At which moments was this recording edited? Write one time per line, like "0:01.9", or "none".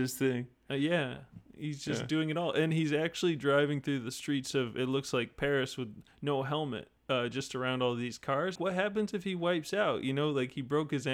0:07.0
0:08.6